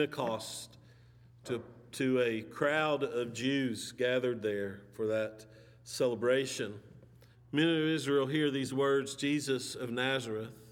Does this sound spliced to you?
yes; 1 cut; at 7.3 s

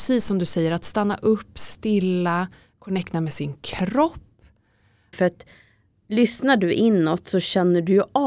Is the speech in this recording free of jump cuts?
no; 1 cut; at 5.1 s

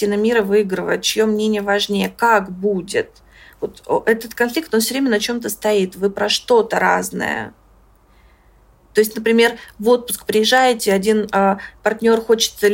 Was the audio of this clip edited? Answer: no; 0 cuts

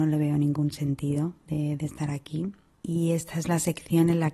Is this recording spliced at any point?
no; 0 cuts

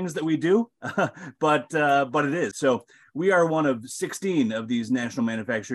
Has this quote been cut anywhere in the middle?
yes; 1 cut; at 2.5 s

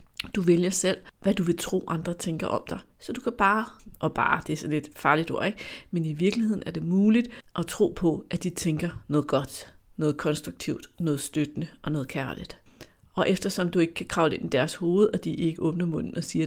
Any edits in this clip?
no; 0 cuts

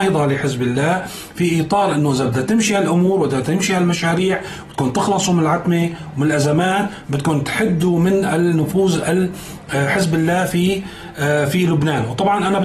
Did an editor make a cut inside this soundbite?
no; 0 cuts

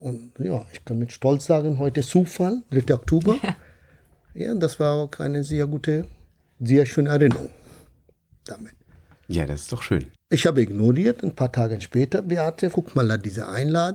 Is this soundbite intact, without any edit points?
no; 2 cuts; at 10.1 s, 12.7 s

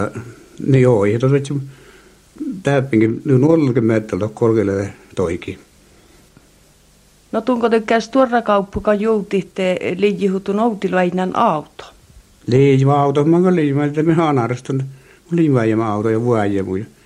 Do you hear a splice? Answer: no; 0 cuts

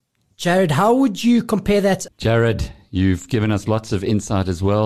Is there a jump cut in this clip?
yes; 1 cut; at 2.1 s

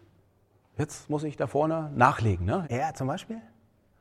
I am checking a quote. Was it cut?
yes; 1 cut; at 2.6 s

